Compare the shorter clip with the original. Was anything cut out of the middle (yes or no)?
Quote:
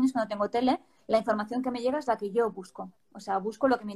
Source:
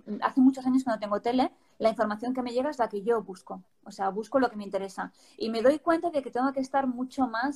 no